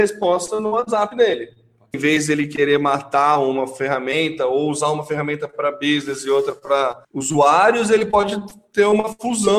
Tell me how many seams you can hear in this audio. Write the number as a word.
two